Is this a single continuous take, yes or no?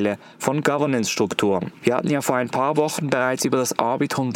no